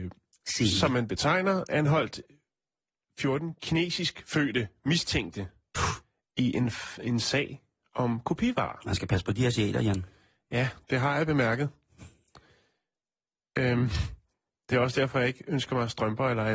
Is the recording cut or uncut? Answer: uncut